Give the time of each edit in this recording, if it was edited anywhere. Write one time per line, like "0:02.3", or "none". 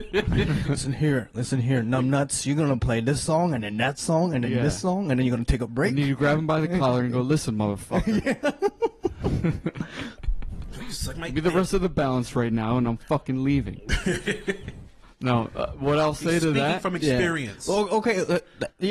none